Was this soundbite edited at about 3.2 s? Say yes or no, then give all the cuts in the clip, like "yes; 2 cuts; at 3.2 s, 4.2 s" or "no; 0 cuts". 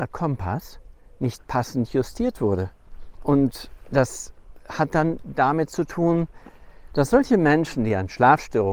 yes; 1 cut; at 3.2 s